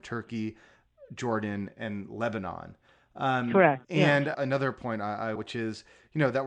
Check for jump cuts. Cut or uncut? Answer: cut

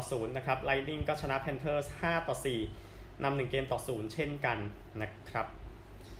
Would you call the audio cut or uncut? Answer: uncut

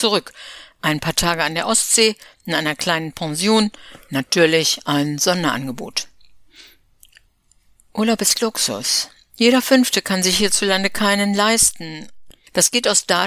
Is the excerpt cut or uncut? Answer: uncut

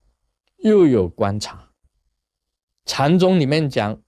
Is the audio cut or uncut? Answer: uncut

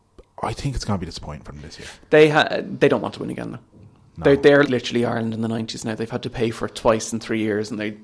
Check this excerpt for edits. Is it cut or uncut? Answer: cut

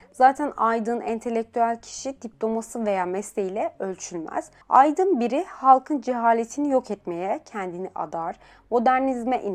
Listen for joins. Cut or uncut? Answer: cut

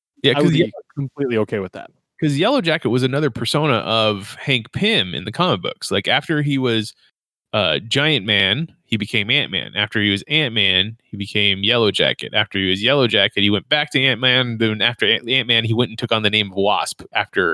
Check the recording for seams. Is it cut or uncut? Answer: uncut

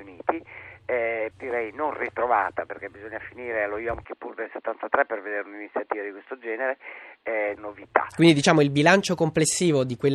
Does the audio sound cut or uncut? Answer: cut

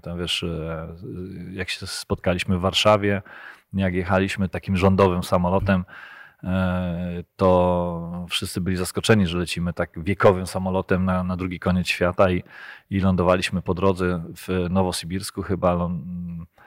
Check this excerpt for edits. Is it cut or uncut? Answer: uncut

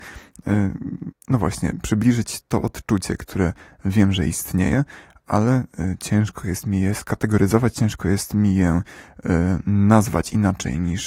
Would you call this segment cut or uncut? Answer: cut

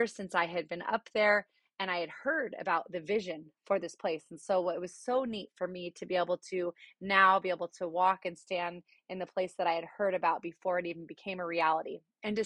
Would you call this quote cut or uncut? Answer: uncut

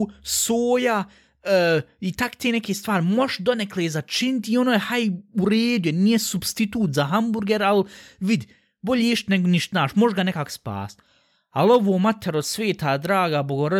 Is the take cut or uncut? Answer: uncut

